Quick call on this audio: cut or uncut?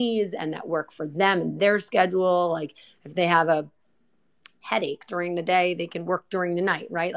uncut